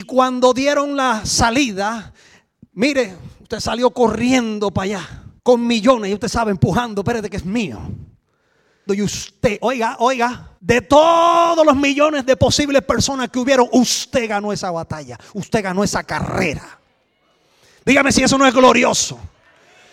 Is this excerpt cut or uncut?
cut